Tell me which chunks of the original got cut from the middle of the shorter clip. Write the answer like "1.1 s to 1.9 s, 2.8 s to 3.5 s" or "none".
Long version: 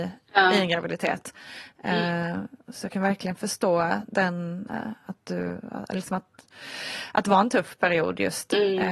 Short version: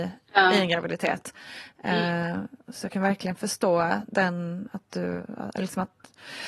4.7 s to 5.0 s